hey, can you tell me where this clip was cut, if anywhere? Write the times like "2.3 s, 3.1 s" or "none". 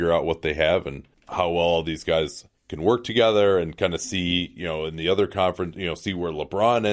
none